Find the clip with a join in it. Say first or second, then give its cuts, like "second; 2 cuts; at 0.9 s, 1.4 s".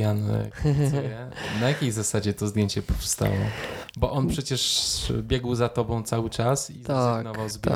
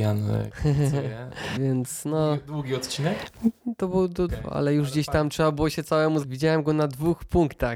second; 3 cuts; at 1.6 s, 4.3 s, 6.2 s